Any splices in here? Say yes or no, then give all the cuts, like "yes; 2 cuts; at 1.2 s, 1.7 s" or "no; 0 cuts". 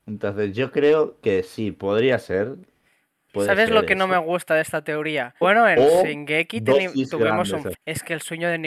yes; 2 cuts; at 5.4 s, 7.7 s